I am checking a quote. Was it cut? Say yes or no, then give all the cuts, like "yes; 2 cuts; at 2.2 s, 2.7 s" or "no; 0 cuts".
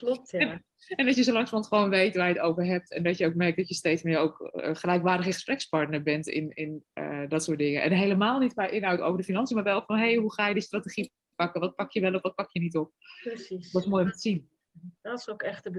no; 0 cuts